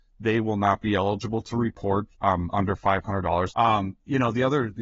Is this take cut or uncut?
cut